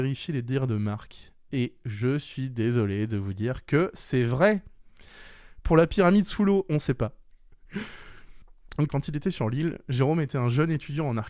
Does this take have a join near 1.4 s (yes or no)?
no